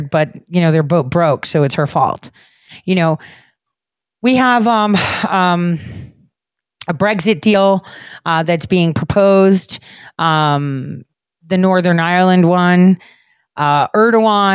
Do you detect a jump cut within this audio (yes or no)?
no